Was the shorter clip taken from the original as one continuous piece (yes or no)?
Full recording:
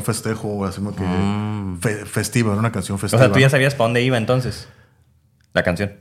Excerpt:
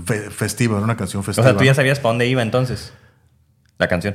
yes